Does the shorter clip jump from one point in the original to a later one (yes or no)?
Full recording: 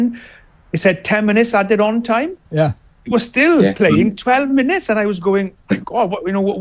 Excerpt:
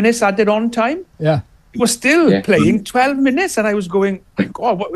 no